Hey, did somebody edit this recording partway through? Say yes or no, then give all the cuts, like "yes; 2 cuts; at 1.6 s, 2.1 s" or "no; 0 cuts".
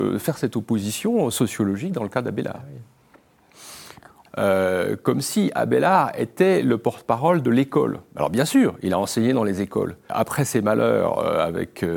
yes; 2 cuts; at 4.3 s, 10.1 s